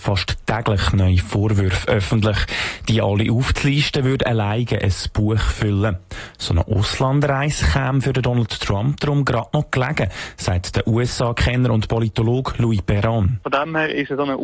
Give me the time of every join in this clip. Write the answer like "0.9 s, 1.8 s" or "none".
none